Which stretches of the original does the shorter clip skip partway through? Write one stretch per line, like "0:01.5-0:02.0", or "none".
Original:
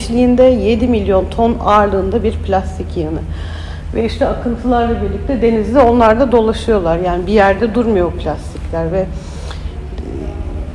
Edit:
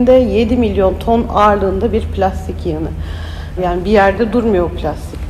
0:03.9-0:07.0

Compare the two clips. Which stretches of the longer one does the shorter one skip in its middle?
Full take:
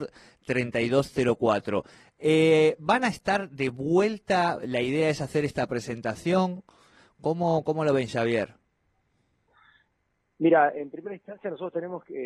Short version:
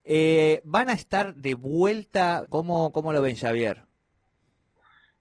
0:04.6-0:07.2

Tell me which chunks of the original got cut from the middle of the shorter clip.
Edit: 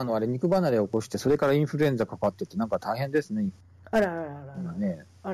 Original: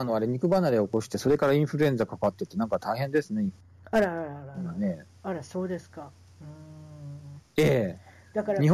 none

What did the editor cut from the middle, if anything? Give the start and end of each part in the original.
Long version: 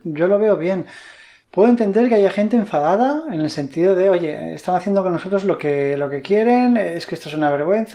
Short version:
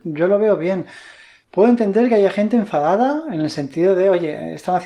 none

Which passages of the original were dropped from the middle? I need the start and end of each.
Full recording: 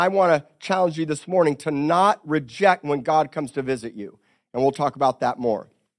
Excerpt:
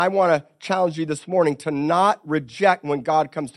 none

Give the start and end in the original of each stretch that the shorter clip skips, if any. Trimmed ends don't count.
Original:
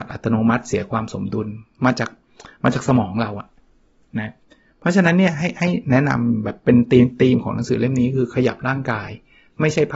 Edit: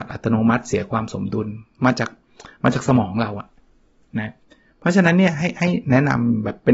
none

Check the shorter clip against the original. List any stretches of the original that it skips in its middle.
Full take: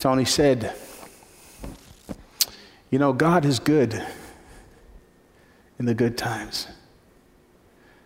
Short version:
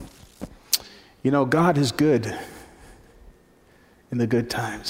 none

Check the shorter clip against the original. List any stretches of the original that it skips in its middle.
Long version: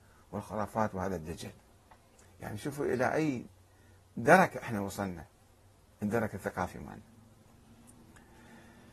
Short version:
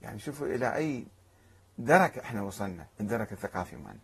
0:05.3-0:05.9

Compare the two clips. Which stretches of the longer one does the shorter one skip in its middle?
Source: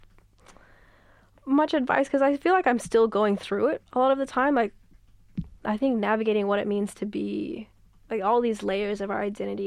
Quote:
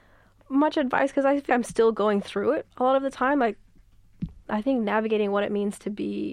0:02.4-0:02.6

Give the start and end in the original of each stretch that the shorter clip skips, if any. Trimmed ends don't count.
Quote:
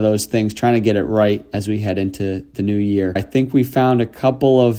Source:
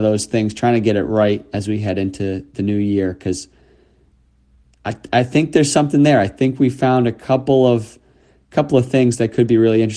0:03.2-0:06.2

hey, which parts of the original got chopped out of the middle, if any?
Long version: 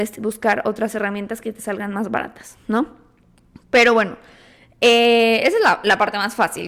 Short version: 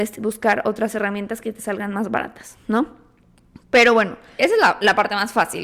0:04.4-0:05.4

